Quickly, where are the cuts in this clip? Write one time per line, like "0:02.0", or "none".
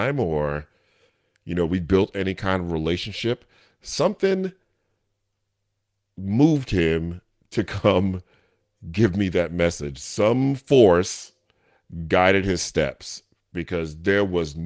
none